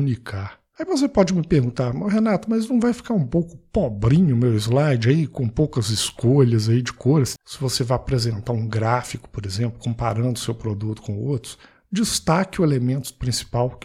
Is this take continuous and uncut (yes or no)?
no